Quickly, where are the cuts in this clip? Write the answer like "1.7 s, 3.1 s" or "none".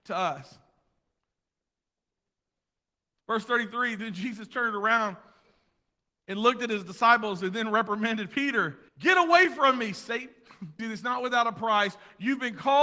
8.9 s, 10.8 s